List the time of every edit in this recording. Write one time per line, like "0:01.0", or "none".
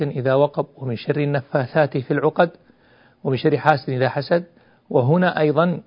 none